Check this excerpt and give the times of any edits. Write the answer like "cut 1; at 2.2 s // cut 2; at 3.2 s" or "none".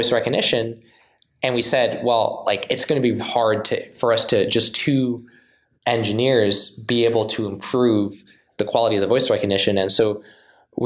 cut 1; at 3.2 s